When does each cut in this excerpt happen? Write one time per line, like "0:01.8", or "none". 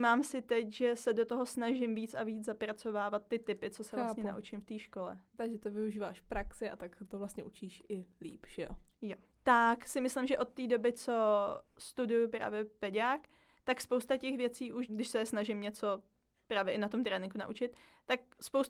0:05.3
0:09.3
0:14.9